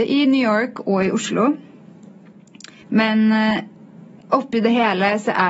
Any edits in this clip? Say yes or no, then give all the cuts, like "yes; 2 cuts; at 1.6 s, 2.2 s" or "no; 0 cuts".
yes; 1 cut; at 2.8 s